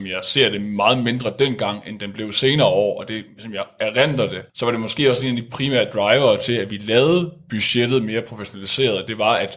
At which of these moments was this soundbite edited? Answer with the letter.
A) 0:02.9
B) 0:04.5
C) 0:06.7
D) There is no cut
B